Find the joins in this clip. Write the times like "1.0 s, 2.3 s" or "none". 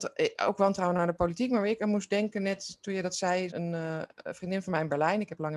3.5 s